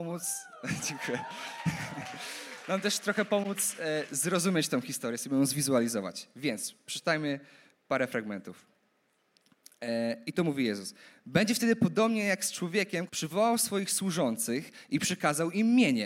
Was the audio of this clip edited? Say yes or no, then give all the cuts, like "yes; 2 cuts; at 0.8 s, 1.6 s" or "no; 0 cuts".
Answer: yes; 1 cut; at 13.1 s